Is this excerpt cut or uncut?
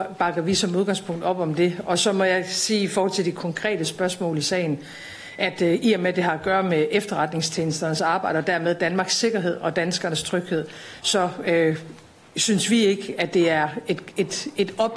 uncut